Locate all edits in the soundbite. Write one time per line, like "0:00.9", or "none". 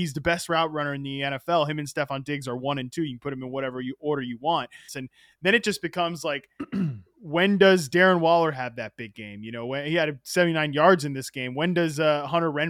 0:04.9